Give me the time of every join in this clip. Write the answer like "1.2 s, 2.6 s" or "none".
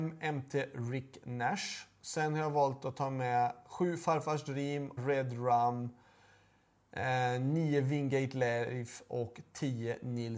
5.0 s